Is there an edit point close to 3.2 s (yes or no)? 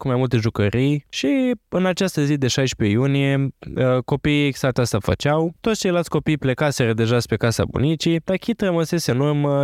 no